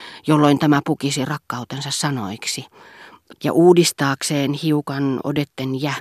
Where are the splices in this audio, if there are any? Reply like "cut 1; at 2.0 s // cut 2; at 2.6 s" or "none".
cut 1; at 3.4 s